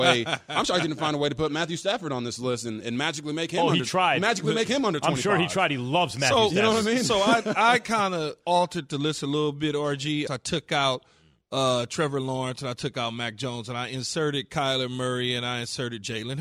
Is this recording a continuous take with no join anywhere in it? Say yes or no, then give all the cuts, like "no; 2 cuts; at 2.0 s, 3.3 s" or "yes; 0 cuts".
no; 1 cut; at 10.3 s